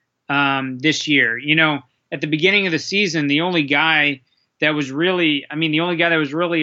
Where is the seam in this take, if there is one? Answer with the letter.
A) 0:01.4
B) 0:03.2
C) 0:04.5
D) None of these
D